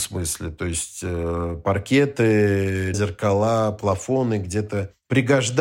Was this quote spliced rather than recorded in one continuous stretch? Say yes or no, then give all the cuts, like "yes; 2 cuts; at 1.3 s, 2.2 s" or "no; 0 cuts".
yes; 1 cut; at 2.9 s